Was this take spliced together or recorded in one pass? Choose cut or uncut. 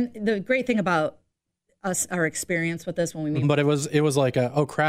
cut